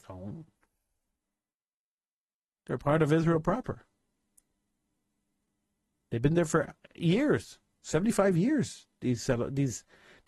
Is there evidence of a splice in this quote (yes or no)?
no